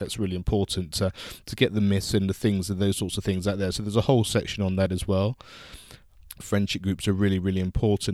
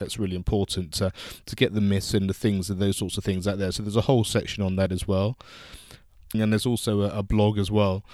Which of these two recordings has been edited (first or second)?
second